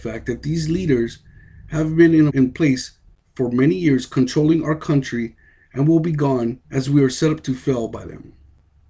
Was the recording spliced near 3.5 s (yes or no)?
no